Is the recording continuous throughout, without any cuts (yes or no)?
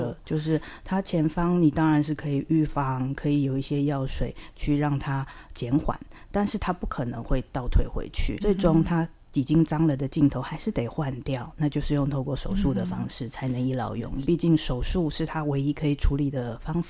no